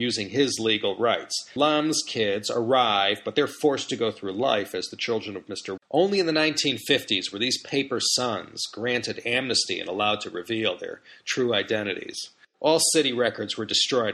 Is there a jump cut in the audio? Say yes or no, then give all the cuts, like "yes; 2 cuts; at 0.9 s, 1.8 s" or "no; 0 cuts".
yes; 3 cuts; at 1.6 s, 5.8 s, 12.5 s